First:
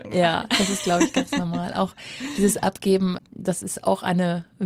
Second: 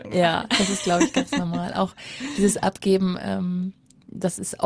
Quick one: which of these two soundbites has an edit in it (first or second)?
first